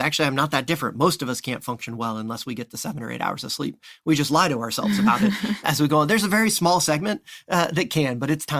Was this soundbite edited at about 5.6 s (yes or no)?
yes